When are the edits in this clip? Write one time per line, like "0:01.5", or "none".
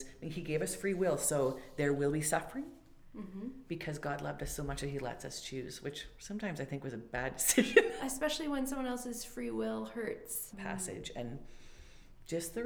0:08.0
0:10.5